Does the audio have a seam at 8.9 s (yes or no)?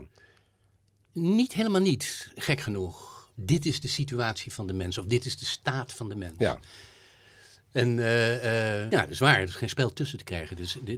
yes